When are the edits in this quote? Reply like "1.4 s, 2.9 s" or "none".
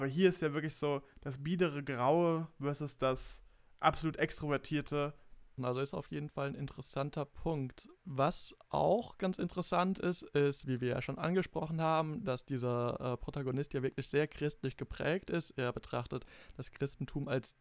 5.6 s